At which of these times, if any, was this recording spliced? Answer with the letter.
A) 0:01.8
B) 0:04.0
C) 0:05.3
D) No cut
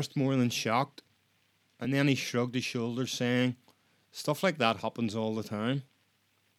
D